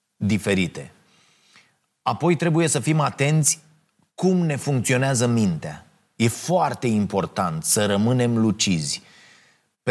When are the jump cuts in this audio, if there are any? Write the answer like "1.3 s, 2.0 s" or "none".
none